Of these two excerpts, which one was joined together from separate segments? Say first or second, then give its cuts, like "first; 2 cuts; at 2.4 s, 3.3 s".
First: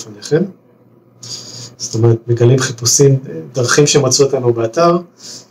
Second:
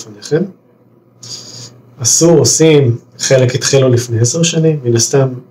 first; 1 cut; at 1.7 s